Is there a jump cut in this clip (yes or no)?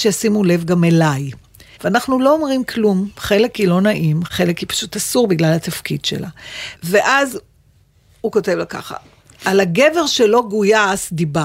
yes